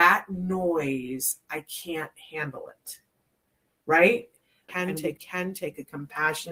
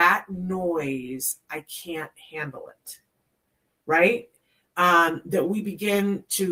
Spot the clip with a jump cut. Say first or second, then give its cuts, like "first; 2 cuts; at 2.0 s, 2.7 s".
first; 1 cut; at 4.7 s